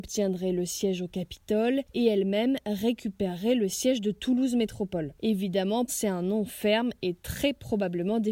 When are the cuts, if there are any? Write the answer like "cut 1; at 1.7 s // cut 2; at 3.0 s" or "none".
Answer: cut 1; at 5.9 s